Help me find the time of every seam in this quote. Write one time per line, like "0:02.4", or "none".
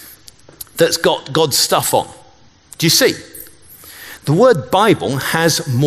0:04.2